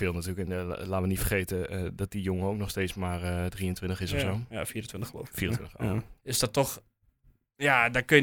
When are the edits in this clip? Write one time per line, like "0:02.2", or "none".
0:06.2